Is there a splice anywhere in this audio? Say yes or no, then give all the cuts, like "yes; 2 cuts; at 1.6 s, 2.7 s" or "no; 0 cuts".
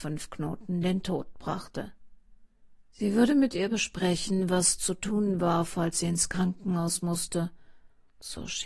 yes; 1 cut; at 2.8 s